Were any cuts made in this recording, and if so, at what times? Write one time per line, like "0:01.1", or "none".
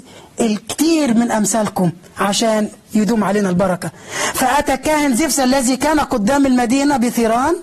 none